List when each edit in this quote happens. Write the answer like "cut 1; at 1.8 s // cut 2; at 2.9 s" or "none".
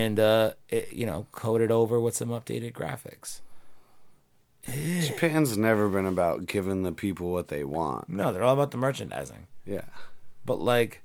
cut 1; at 4.7 s

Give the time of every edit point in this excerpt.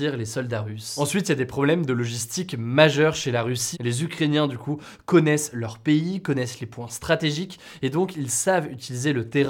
cut 1; at 3.7 s

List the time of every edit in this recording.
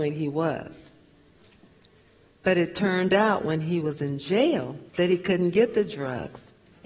cut 1; at 4.9 s

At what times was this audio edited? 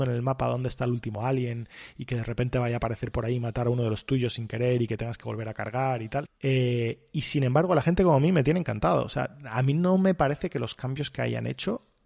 cut 1; at 6.2 s

